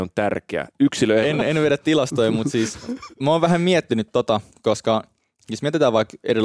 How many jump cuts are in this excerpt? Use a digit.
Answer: 1